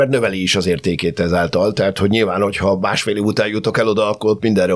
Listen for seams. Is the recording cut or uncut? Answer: uncut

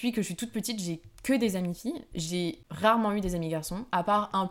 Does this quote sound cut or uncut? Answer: uncut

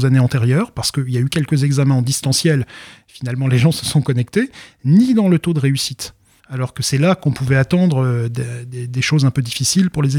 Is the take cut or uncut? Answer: cut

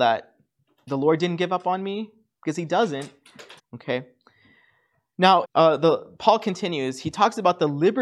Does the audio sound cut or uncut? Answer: cut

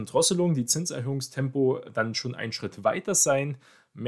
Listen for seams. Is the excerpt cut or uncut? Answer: uncut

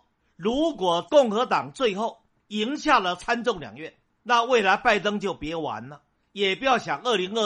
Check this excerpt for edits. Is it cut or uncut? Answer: uncut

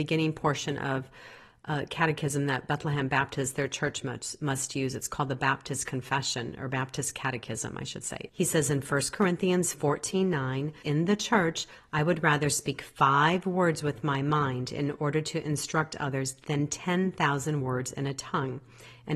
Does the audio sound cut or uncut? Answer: cut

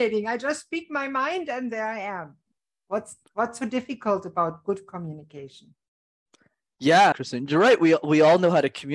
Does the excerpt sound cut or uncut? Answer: cut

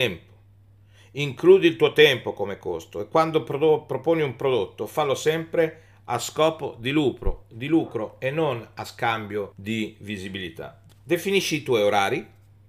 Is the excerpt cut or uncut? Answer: cut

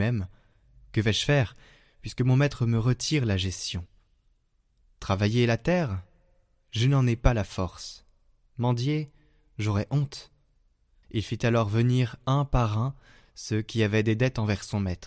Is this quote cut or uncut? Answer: cut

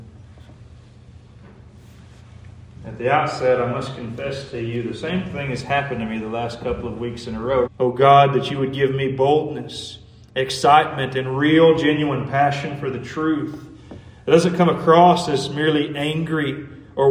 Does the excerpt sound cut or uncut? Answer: cut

